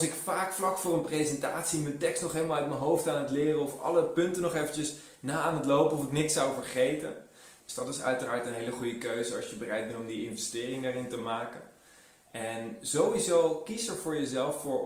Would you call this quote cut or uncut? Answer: cut